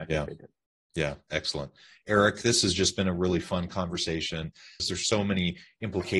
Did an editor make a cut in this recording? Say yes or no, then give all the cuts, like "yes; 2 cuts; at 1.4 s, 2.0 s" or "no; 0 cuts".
yes; 1 cut; at 4.8 s